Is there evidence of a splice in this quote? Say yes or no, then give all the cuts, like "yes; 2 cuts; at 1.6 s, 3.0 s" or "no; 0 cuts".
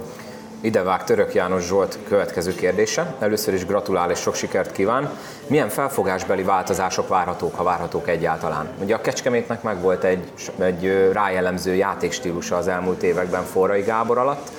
no; 0 cuts